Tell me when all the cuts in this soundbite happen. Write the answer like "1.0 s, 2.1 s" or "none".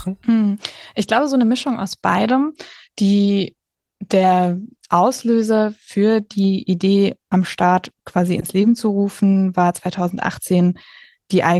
none

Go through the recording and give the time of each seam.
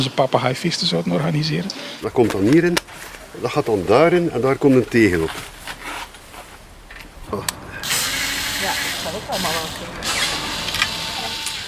2.0 s, 7.3 s

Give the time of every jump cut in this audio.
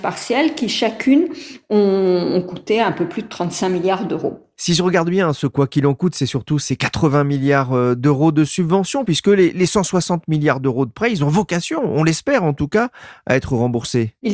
none

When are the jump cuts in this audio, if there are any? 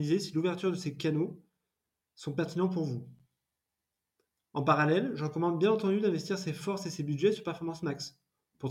none

